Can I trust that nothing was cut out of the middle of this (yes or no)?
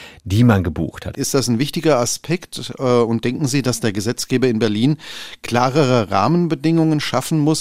no